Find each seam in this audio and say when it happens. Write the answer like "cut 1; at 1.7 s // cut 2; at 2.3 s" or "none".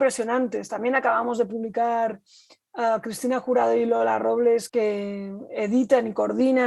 none